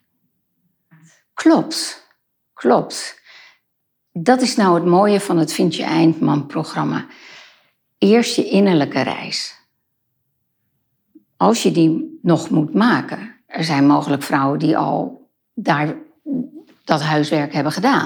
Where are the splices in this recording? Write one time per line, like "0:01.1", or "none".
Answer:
none